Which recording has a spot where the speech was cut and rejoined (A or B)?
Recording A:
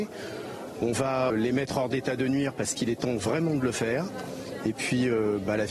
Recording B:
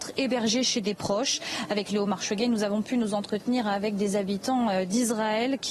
A